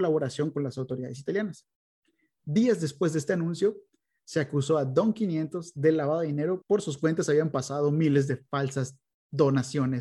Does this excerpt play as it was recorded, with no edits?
no; 1 cut; at 6.6 s

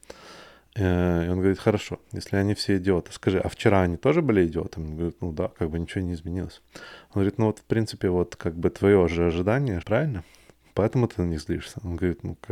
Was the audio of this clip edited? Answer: yes; 1 cut; at 9.8 s

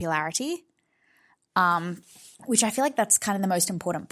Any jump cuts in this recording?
yes; 1 cut; at 2.3 s

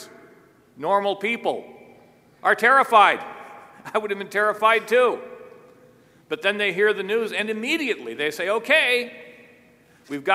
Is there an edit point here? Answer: no; 0 cuts

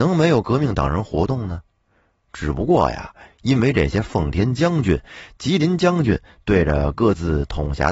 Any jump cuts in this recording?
no; 0 cuts

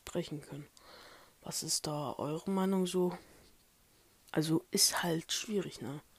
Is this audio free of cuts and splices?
yes; 0 cuts

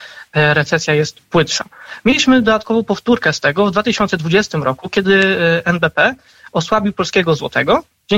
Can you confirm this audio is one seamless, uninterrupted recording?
yes; 0 cuts

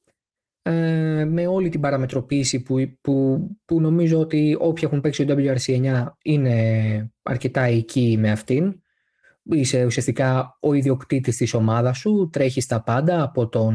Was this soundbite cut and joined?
no; 0 cuts

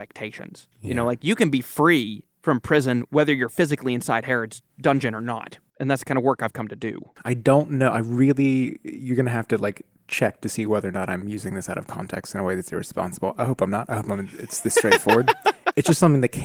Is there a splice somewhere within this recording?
no; 0 cuts

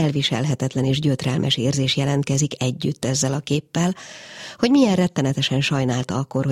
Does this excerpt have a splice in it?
no; 0 cuts

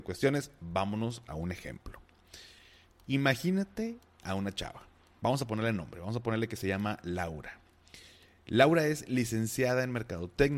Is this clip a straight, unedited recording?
yes; 0 cuts

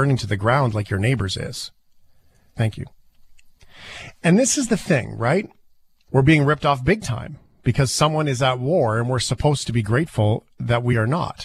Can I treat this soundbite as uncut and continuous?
no; 2 cuts; at 2.5 s, 6.1 s

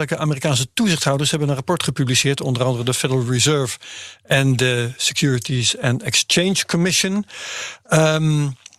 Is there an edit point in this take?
no; 0 cuts

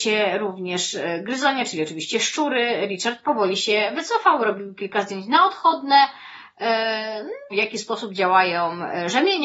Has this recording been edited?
yes; 1 cut; at 7.5 s

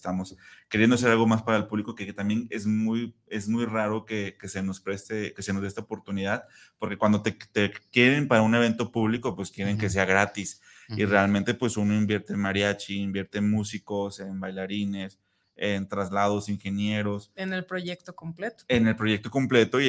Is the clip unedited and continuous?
yes; 0 cuts

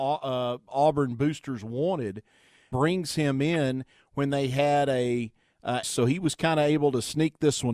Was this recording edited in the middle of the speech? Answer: yes; 2 cuts; at 2.7 s, 5.8 s

